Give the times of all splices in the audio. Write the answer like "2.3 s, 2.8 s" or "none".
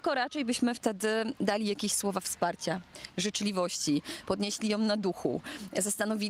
none